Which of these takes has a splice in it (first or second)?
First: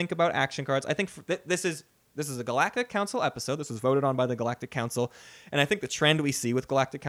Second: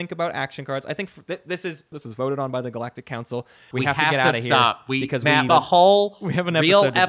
second